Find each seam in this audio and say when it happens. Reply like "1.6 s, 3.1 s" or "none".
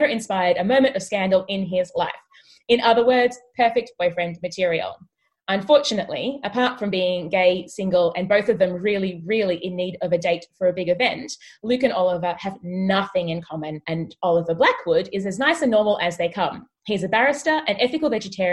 13.8 s